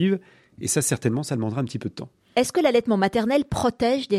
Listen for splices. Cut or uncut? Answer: uncut